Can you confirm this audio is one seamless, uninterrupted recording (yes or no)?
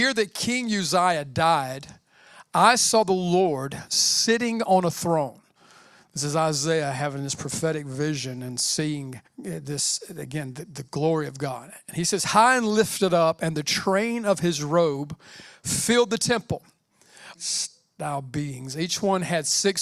no